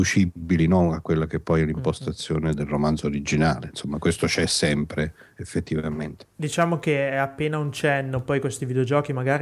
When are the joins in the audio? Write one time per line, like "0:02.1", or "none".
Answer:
0:02.5